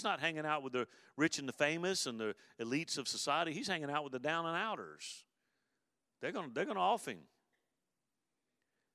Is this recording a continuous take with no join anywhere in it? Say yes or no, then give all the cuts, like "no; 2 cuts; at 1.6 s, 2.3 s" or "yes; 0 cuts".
yes; 0 cuts